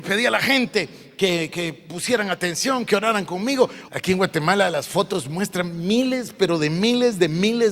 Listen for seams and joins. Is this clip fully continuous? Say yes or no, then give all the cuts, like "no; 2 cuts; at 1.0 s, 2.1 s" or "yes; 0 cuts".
no; 1 cut; at 3.9 s